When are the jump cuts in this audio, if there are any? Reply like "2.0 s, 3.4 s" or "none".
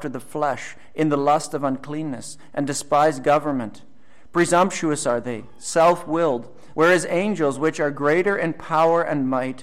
6.7 s